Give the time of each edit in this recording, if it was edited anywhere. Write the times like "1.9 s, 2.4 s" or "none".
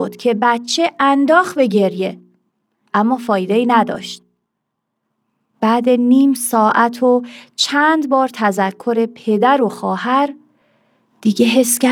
2.8 s